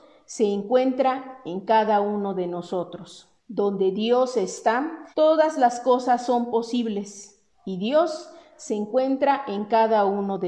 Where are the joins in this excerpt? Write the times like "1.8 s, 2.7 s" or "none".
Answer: 3.4 s, 5.1 s